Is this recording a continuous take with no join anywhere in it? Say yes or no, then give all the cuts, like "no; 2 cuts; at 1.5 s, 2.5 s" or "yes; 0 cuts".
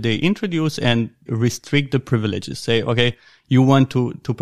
no; 1 cut; at 1.3 s